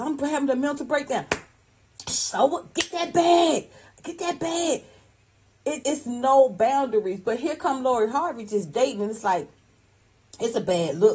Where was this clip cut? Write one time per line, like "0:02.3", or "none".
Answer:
0:05.8